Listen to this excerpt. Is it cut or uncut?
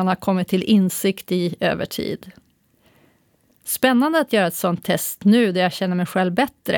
uncut